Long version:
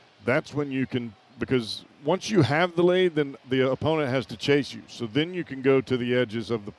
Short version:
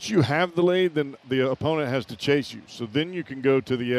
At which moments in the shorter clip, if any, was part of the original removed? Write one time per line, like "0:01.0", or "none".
none

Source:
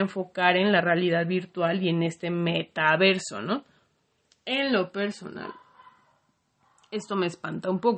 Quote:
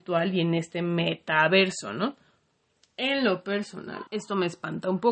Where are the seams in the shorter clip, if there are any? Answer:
0:04.1

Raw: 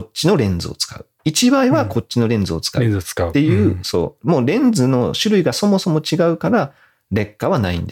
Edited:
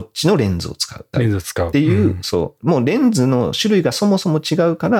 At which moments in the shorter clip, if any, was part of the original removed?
0:01.1

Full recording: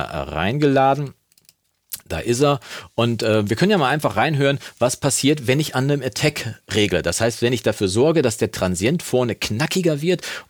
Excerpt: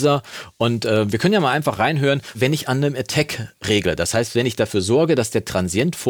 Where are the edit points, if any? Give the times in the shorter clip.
0:02.3

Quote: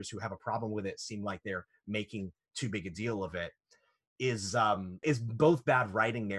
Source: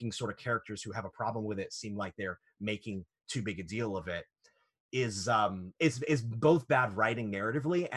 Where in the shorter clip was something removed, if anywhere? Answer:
0:05.0

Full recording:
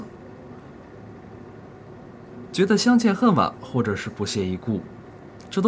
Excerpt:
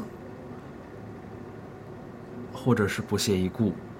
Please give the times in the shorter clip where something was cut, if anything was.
0:02.5

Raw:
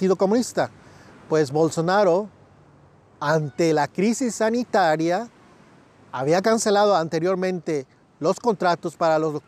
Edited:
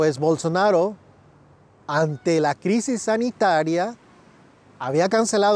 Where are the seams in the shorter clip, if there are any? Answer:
none

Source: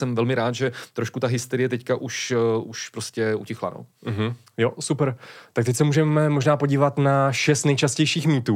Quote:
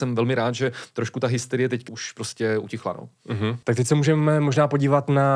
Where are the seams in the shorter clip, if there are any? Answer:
0:01.9
0:03.6

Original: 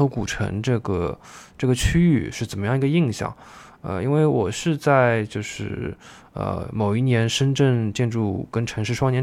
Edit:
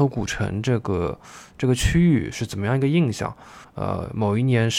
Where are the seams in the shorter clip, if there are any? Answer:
0:03.6

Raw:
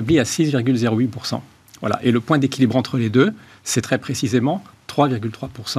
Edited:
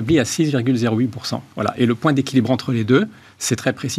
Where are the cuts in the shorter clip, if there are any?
0:01.5

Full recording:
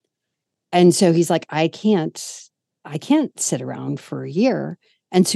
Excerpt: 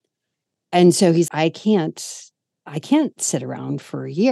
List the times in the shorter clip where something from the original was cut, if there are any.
0:01.3

